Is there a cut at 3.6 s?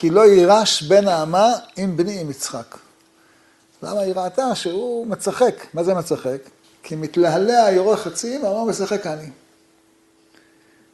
no; 1 cut; at 6.6 s

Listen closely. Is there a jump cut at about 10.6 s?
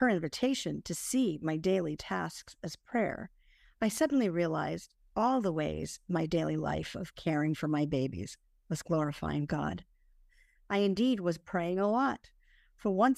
no; 0 cuts

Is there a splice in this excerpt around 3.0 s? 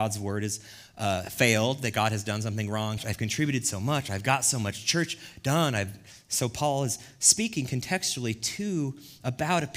yes; 1 cut; at 3.0 s

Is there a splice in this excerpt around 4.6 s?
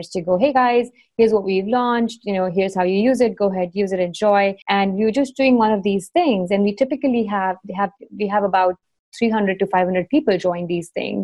yes; 1 cut; at 4.6 s

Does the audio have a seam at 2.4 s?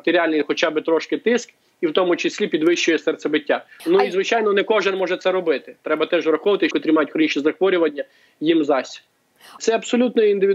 no; 3 cuts; at 3.8 s, 6.7 s, 9.6 s

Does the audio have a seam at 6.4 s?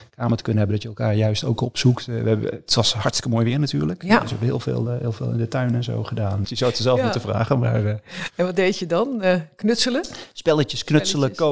yes; 1 cut; at 6.4 s

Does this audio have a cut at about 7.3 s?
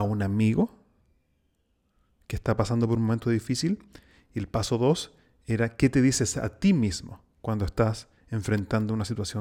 yes; 1 cut; at 7.3 s

